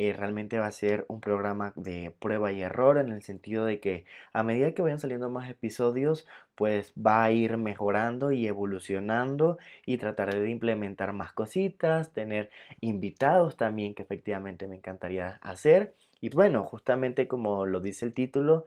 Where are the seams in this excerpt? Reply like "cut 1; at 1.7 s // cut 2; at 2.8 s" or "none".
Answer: cut 1; at 16.3 s